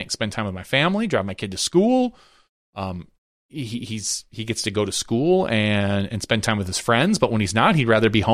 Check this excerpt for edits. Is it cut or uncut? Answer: uncut